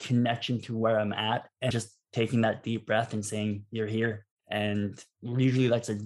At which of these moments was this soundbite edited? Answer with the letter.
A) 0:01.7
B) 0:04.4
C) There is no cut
A